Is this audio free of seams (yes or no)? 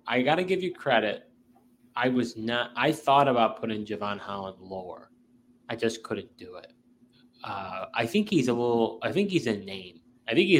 yes